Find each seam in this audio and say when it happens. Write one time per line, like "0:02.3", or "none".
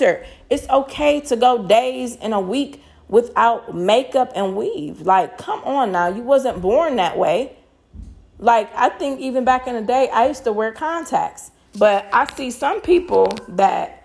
0:11.7